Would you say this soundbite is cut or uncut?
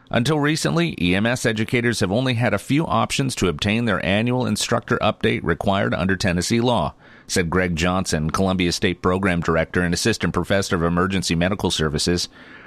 uncut